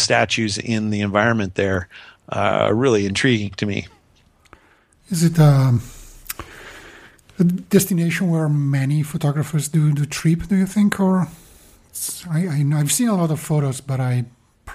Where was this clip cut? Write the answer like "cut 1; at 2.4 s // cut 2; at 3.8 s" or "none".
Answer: none

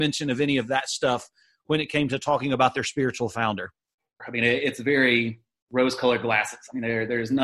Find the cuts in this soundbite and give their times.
cut 1; at 4.2 s

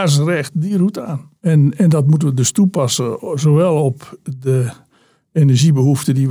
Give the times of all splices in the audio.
cut 1; at 1.4 s

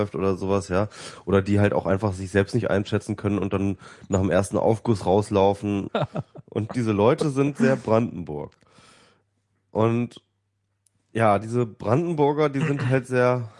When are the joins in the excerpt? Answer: cut 1; at 5.9 s

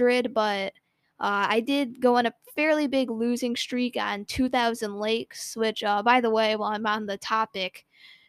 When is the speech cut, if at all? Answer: none

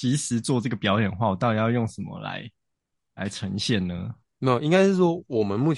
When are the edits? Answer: none

